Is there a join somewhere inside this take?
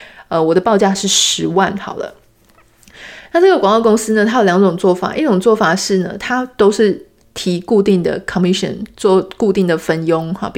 no; 0 cuts

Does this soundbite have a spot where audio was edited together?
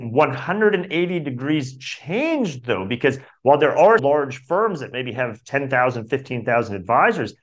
yes; 1 cut; at 4.0 s

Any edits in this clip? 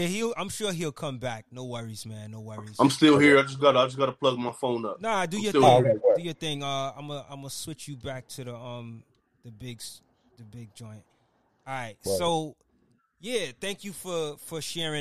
no; 0 cuts

